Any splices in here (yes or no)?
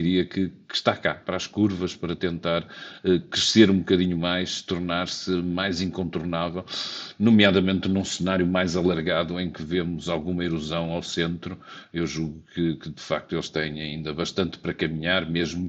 no